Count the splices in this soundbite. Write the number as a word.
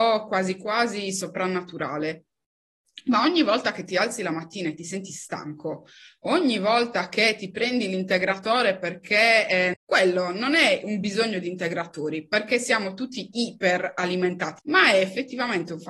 two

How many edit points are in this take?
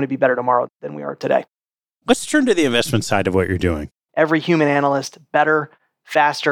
one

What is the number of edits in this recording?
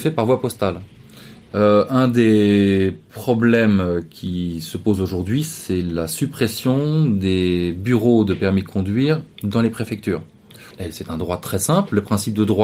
two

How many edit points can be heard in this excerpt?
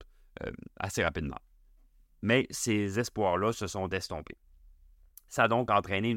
zero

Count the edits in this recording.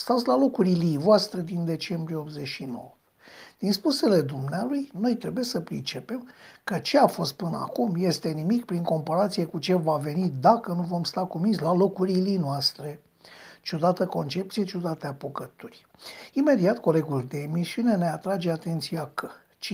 zero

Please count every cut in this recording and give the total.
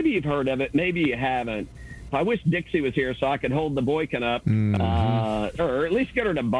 two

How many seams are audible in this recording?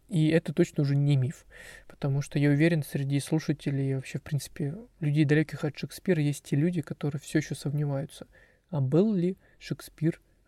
zero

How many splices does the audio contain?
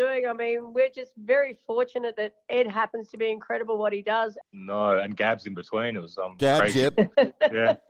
one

